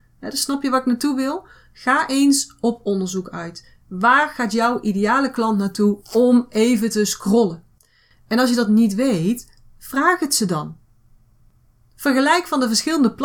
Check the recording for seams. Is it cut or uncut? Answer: uncut